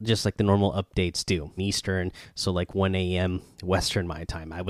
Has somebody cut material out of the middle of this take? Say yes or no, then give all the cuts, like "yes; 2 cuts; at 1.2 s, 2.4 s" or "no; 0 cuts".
yes; 1 cut; at 1.6 s